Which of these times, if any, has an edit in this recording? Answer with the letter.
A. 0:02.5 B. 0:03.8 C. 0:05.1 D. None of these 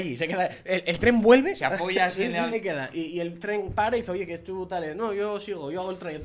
A